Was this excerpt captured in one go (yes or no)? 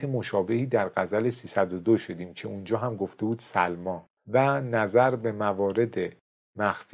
no